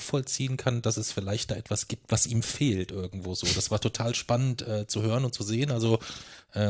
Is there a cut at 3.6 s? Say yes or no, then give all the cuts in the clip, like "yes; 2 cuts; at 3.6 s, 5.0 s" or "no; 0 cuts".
no; 0 cuts